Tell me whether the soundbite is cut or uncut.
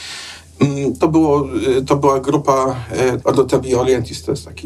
cut